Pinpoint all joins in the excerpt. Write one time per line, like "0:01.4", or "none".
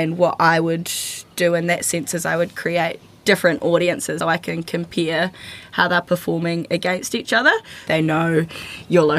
0:04.2
0:07.9